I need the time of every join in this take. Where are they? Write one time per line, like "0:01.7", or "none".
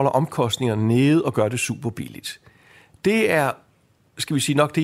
none